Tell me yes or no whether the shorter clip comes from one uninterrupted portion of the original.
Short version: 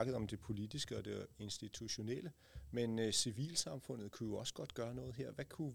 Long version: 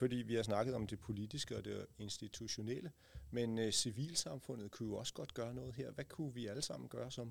yes